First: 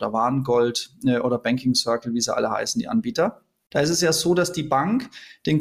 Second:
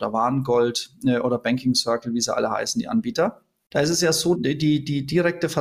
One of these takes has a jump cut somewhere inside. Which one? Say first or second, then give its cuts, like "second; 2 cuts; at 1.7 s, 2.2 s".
second; 1 cut; at 4.3 s